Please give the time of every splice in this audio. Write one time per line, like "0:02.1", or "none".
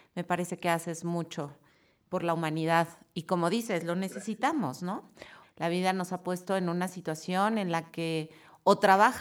0:05.4